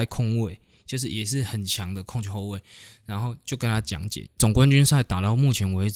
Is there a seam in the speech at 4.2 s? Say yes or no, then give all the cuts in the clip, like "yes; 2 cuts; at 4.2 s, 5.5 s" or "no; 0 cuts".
yes; 1 cut; at 4.2 s